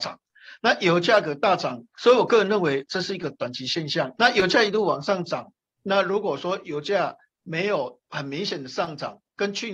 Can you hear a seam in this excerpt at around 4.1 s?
yes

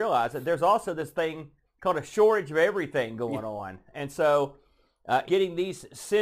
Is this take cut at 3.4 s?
no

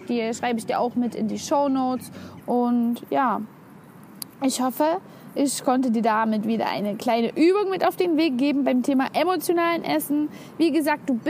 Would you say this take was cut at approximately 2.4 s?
yes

